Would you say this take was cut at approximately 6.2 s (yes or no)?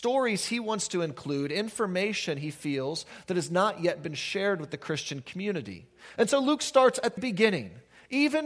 yes